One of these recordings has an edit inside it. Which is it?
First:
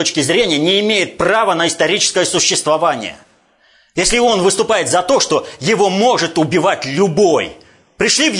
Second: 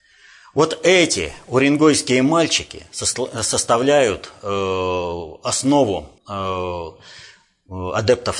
second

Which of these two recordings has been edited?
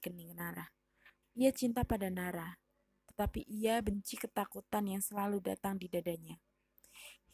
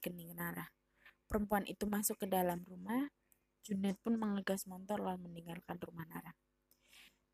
first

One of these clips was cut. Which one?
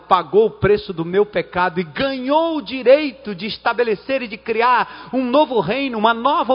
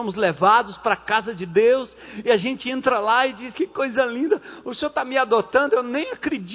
second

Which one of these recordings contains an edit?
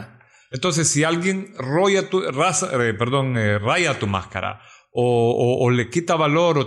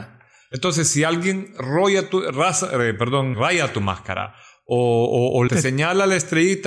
second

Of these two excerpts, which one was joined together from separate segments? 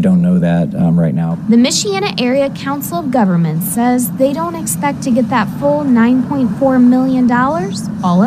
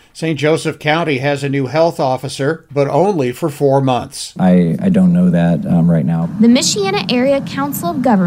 second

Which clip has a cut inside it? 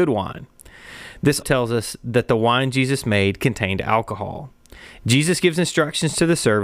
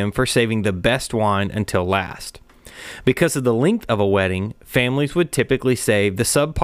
first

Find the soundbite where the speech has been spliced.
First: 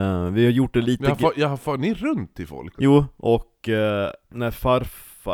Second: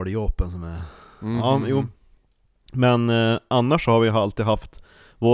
first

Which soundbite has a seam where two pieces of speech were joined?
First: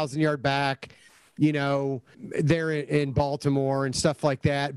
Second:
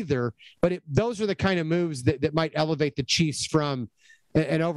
first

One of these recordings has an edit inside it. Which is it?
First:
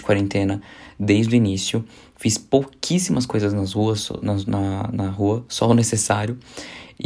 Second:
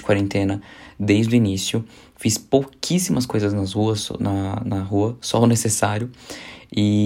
second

